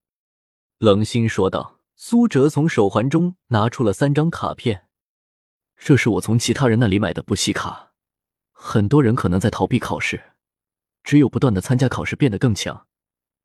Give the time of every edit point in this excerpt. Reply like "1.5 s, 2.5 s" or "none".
1.9 s, 8.5 s, 10.9 s